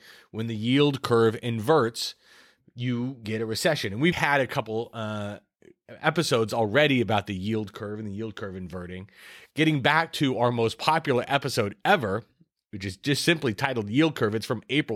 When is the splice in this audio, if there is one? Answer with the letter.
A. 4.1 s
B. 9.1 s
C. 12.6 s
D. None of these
A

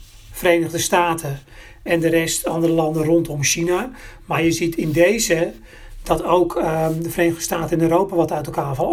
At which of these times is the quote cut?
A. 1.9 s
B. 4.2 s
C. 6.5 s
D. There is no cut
A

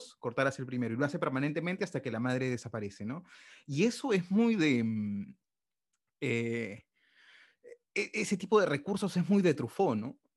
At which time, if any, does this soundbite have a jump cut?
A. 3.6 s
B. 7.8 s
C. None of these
C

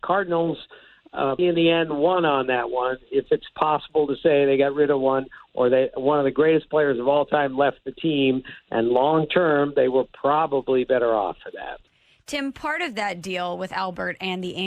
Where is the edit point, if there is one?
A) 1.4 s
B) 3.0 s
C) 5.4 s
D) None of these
A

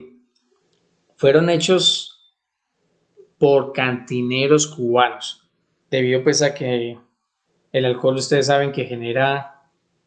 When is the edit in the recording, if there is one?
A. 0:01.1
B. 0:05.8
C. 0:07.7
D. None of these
B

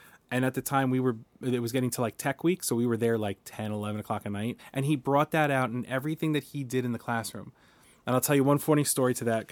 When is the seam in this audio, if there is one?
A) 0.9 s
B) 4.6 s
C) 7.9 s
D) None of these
B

